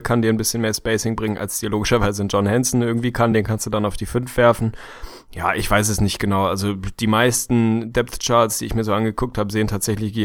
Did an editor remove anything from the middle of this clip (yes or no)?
no